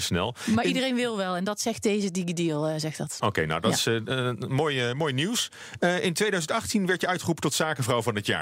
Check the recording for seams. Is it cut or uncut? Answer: uncut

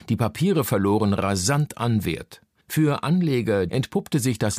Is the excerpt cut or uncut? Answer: cut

